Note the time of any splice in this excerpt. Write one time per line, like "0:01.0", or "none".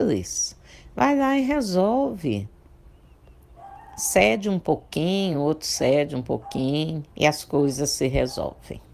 0:05.3
0:07.1